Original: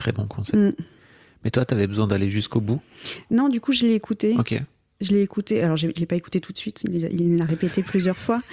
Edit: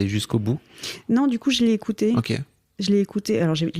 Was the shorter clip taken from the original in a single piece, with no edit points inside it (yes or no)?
yes